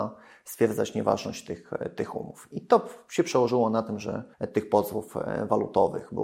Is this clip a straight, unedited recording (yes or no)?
no